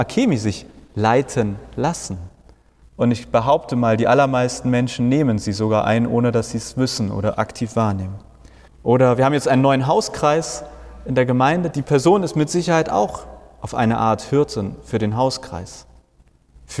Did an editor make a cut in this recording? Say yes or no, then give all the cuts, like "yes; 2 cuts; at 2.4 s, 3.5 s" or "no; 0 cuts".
yes; 3 cuts; at 2.8 s, 8.7 s, 11.7 s